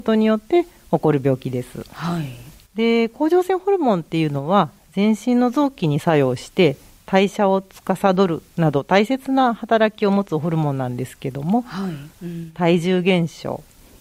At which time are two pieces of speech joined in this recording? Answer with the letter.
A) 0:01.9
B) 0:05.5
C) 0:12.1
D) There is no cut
C